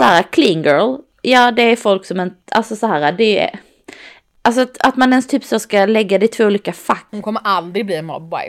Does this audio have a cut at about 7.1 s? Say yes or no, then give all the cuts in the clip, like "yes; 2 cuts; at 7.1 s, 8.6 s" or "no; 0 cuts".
yes; 1 cut; at 7.1 s